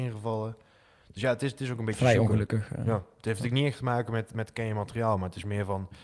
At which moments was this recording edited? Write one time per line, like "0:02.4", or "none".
none